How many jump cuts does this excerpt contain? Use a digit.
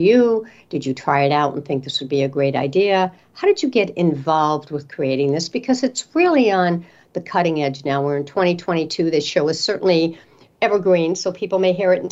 0